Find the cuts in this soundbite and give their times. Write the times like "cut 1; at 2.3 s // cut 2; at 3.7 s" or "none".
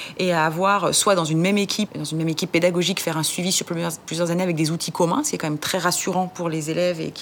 cut 1; at 1.9 s